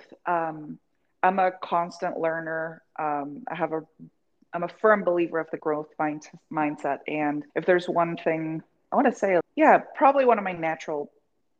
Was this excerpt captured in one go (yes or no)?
no